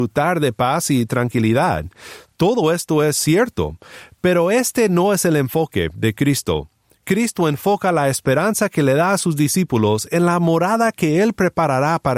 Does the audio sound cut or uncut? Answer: uncut